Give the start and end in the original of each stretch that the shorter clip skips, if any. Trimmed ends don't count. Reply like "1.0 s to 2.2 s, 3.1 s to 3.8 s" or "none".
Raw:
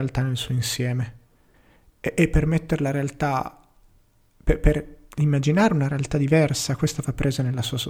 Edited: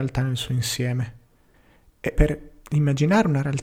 2.1 s to 4.6 s